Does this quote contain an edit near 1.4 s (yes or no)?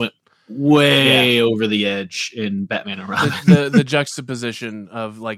no